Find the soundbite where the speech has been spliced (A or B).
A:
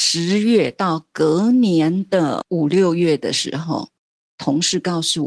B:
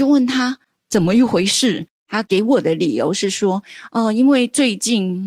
B